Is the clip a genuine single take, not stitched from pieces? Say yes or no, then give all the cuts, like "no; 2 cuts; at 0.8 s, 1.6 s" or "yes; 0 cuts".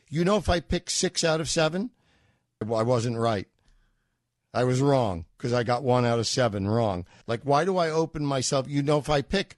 no; 2 cuts; at 2.6 s, 7.2 s